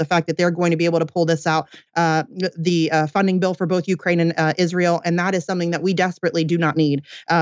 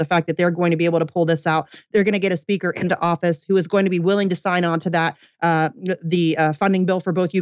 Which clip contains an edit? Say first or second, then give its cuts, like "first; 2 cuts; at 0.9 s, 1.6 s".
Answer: first; 1 cut; at 1.9 s